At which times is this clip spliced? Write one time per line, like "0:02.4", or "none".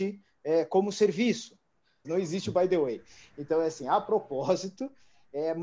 0:02.0